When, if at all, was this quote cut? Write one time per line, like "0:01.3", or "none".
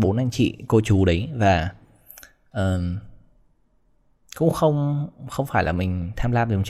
none